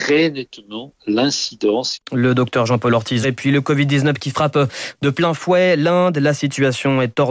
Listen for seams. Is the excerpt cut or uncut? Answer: cut